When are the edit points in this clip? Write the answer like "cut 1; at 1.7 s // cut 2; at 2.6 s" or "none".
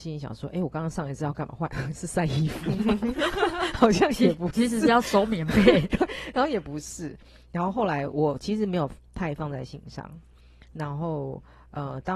none